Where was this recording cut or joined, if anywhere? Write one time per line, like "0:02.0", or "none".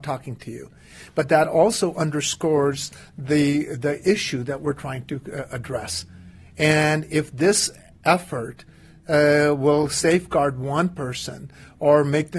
none